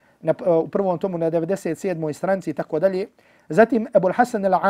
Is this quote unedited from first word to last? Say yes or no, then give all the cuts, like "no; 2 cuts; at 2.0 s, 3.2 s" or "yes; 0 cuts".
yes; 0 cuts